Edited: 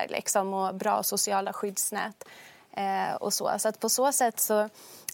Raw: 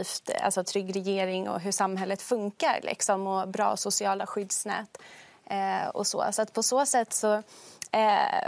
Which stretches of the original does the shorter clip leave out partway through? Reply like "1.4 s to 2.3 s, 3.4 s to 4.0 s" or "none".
none